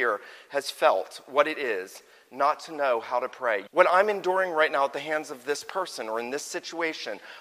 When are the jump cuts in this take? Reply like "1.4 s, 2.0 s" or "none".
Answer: 3.7 s